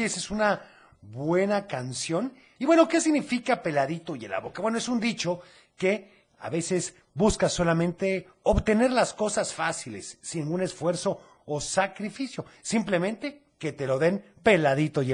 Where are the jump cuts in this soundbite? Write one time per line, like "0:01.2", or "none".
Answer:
0:02.6